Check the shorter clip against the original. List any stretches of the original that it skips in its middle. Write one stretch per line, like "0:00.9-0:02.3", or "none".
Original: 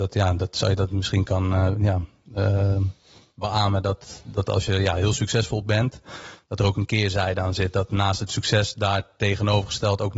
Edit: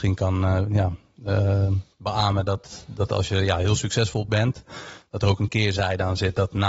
0:03.0-0:03.3